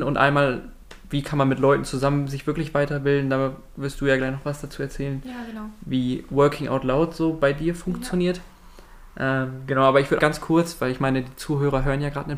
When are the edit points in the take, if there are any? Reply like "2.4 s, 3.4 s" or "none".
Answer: 10.2 s